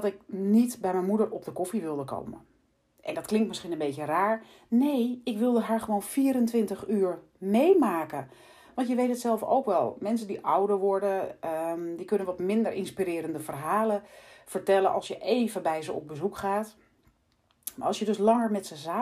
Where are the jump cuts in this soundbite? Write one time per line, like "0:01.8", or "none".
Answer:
none